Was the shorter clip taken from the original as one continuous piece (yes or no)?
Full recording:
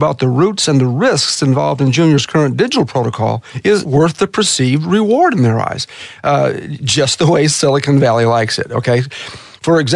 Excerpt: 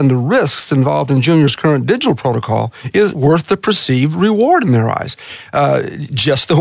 yes